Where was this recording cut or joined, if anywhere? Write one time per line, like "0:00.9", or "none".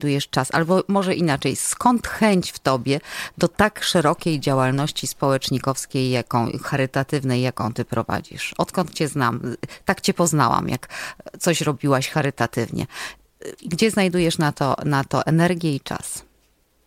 none